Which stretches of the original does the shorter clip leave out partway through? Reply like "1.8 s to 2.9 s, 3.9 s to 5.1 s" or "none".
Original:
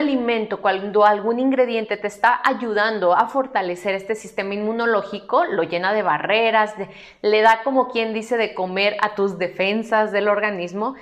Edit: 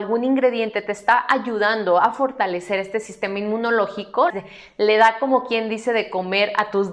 5.5 s to 6.7 s